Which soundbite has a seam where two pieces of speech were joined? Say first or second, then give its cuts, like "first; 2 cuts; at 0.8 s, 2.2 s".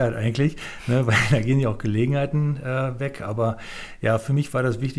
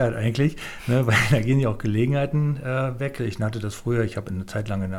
second; 1 cut; at 3.2 s